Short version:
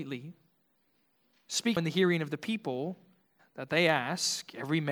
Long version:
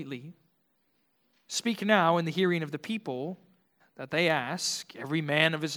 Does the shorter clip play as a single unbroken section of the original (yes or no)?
no